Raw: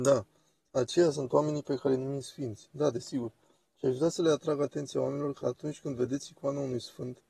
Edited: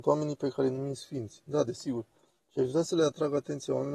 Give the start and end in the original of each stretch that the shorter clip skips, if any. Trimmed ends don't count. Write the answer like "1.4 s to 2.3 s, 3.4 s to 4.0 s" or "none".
none